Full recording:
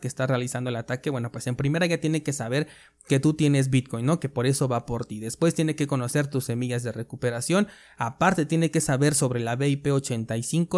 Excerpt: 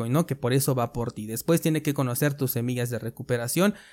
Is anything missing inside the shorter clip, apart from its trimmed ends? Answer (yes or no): no